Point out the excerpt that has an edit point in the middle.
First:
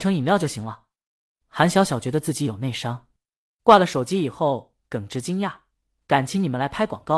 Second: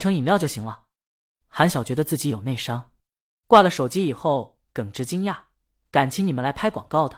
second; 1 cut; at 1.7 s

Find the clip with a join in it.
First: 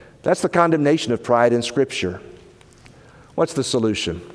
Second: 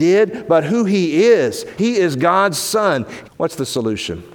second; 2 cuts; at 1.8 s, 3.2 s

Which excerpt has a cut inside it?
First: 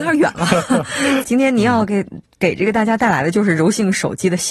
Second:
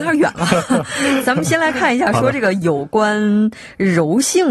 first; 1 cut; at 1.2 s

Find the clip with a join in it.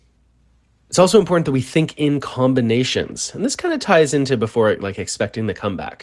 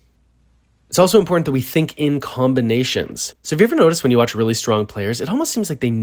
second; 1 cut; at 3.3 s

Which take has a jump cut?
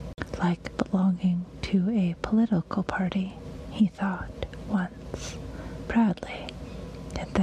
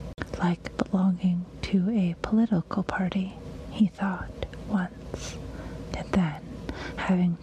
second; 1 cut; at 5.9 s

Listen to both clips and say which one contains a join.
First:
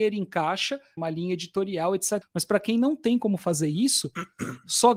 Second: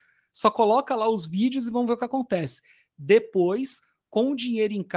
first; 2 cuts; at 1.0 s, 2.2 s

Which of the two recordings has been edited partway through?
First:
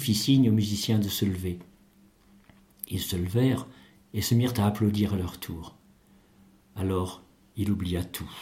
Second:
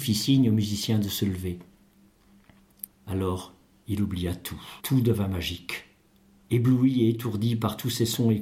second; 2 cuts; at 2.9 s, 4.8 s

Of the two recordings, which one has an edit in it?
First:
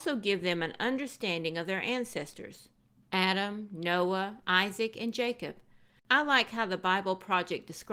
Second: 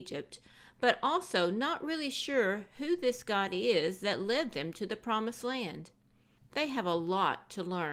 first; 2 cuts; at 4.4 s, 6.0 s

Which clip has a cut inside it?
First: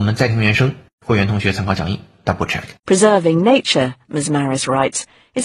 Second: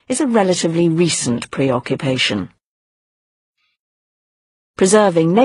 first; 1 cut; at 2.8 s

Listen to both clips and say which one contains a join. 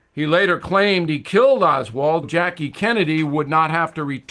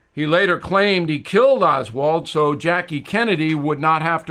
first; 1 cut; at 2.2 s

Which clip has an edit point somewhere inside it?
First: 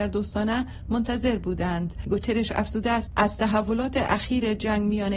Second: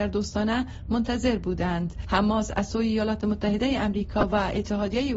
second; 1 cut; at 2.1 s

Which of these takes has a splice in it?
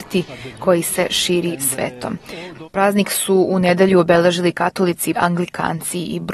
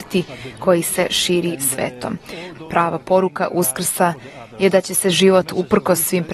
first; 2 cuts; at 2.7 s, 5.1 s

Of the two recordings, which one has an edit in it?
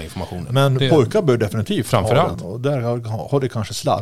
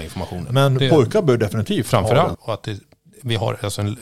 second; 1 cut; at 2.3 s

